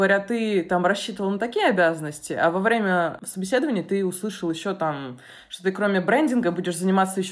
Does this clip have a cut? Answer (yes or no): no